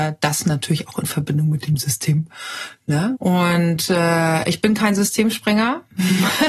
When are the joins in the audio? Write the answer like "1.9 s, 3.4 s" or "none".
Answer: 3.1 s